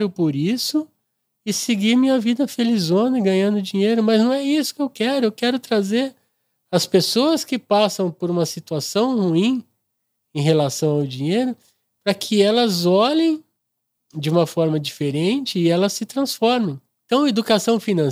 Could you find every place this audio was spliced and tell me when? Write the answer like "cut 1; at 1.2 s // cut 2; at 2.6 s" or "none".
none